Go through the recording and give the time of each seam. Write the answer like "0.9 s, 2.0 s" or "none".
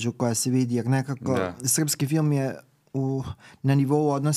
none